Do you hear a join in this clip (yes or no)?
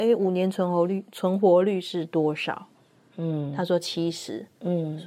no